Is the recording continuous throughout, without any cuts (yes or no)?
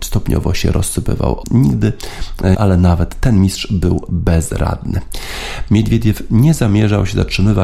no